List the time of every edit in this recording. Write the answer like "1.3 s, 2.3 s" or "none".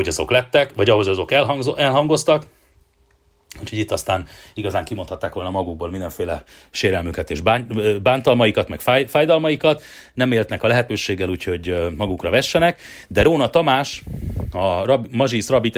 none